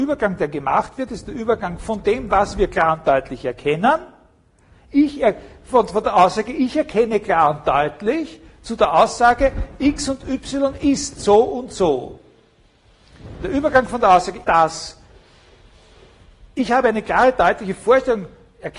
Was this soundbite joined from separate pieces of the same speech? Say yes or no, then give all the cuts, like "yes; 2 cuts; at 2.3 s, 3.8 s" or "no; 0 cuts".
yes; 1 cut; at 14.4 s